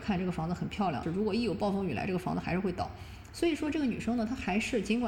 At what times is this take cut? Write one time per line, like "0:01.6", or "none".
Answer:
0:01.0